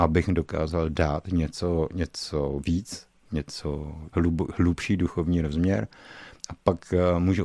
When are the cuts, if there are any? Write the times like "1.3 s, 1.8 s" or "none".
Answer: 4.1 s